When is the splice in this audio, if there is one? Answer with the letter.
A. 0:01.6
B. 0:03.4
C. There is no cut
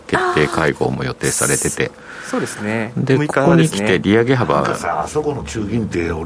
C